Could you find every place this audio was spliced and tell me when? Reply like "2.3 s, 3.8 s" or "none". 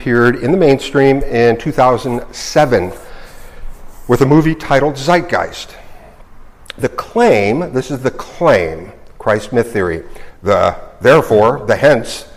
10.3 s